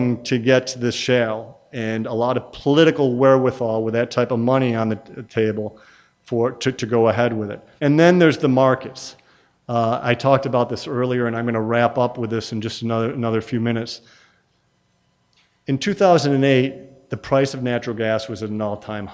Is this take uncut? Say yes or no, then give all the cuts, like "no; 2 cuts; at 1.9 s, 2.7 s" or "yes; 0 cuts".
no; 1 cut; at 7.8 s